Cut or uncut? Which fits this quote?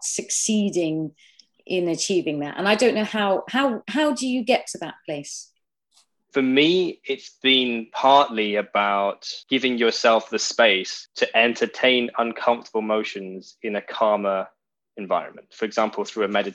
uncut